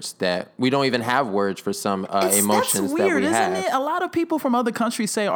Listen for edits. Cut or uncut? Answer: uncut